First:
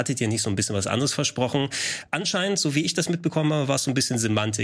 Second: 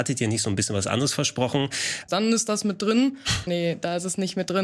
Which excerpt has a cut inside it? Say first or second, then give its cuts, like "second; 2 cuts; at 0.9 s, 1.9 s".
second; 2 cuts; at 2.1 s, 3.5 s